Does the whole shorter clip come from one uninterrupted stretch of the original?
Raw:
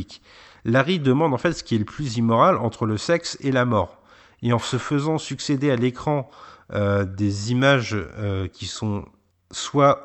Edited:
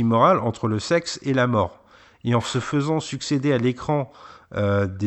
yes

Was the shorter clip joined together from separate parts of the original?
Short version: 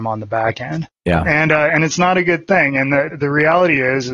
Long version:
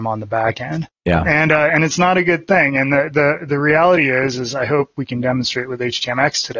yes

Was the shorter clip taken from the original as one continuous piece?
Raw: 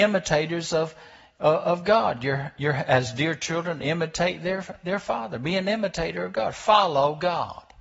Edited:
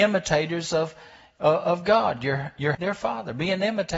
no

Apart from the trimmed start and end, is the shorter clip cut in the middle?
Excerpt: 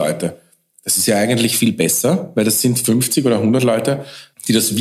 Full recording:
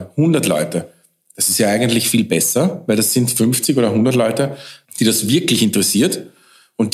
no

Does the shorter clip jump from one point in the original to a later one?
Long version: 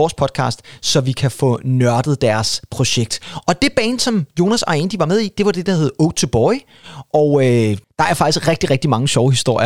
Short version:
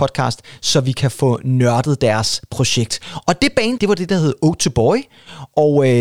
yes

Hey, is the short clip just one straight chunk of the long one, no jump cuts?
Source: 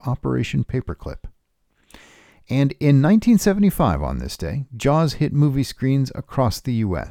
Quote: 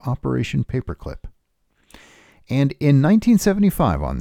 yes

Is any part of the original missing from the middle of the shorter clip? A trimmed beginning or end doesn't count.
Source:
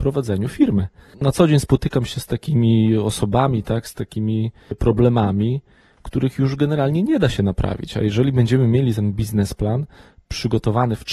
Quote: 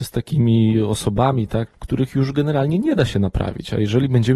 yes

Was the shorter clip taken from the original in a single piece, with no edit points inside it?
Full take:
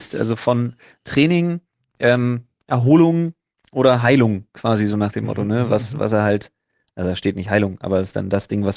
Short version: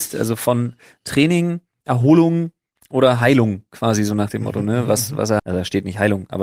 no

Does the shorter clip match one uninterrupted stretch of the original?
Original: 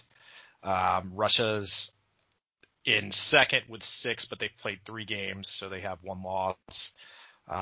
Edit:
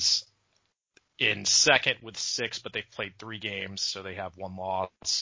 yes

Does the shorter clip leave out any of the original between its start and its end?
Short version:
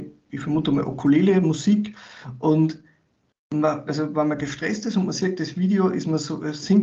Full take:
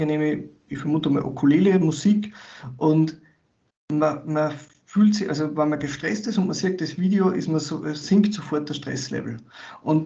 yes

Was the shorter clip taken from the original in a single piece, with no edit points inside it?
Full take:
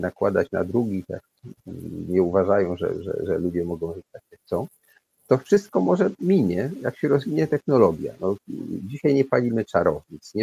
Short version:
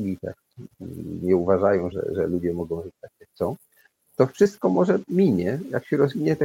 no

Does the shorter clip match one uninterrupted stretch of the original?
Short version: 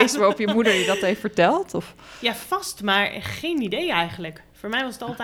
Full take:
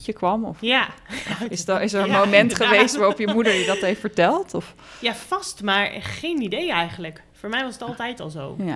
yes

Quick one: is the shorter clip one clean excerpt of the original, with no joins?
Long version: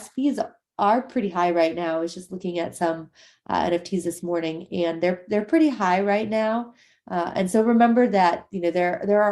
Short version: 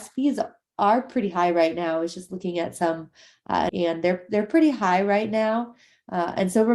no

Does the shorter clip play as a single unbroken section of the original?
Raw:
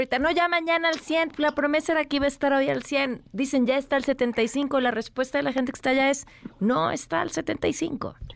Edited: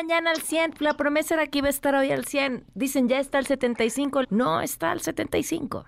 no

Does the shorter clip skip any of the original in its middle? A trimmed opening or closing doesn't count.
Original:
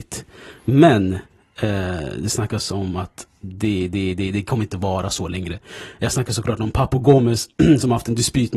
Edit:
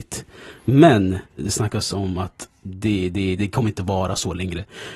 yes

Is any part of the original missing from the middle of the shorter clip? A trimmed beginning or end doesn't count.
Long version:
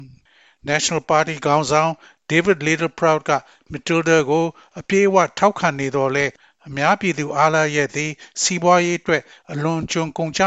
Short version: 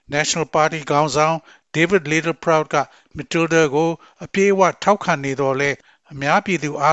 no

